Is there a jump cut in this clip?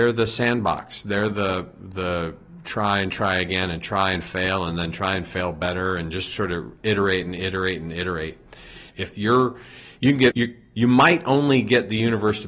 yes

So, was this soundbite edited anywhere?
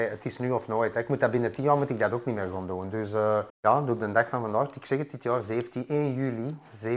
yes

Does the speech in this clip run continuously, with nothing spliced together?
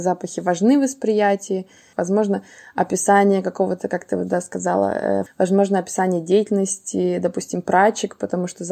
no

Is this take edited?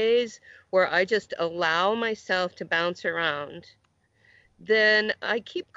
no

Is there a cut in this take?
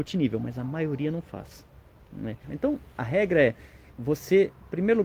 yes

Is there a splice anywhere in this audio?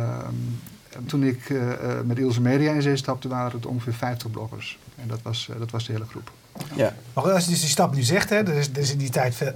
yes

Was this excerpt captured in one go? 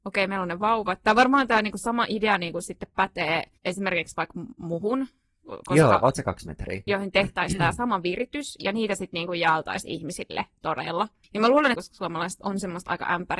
no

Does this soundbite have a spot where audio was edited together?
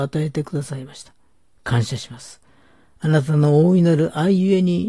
no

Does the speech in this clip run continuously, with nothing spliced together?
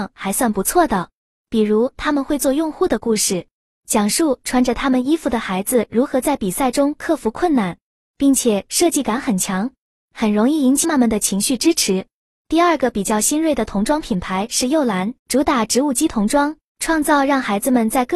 no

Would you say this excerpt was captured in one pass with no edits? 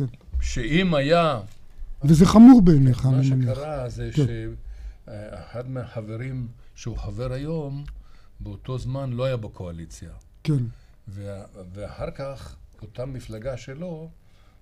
no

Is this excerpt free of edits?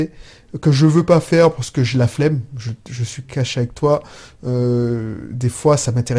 yes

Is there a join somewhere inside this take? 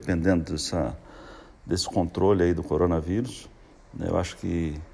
no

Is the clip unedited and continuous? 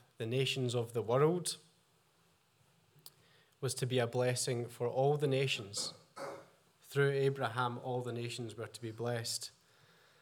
yes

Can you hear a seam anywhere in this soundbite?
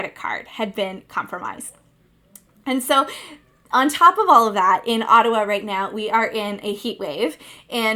no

